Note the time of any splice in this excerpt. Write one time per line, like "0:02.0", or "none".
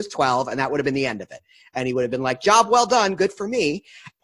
none